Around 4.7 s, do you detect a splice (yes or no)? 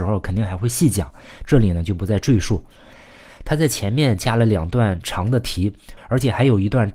no